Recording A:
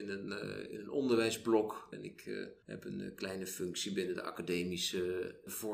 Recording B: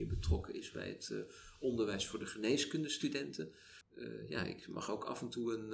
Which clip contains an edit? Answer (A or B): A